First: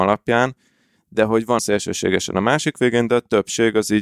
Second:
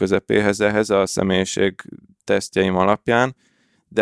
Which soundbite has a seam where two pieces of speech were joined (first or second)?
first